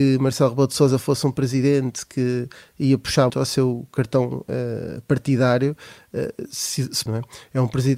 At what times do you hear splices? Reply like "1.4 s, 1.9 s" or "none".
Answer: 3.3 s, 7.1 s